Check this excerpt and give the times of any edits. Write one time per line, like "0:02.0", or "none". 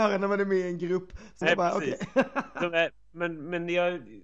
0:01.4